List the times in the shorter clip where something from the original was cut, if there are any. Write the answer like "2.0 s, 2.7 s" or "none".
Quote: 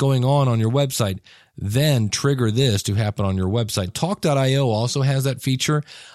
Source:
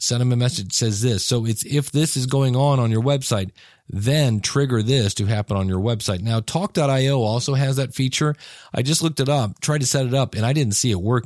3.9 s